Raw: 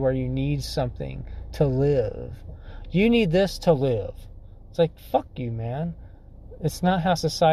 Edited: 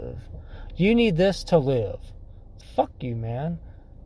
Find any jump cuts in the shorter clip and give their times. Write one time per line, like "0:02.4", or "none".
0:02.6

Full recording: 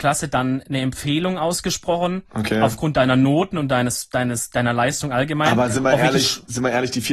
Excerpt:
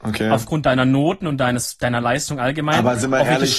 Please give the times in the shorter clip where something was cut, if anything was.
0:01.8

